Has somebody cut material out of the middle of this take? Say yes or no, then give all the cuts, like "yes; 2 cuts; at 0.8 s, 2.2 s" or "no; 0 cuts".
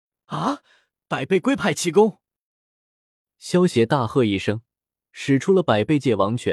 no; 0 cuts